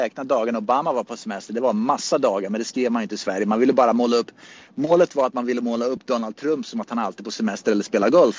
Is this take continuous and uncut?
yes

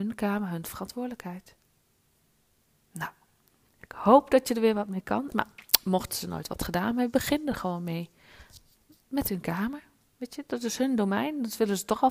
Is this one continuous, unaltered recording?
no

